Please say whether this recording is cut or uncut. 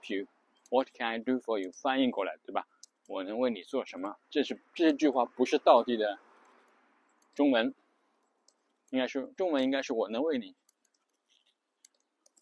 cut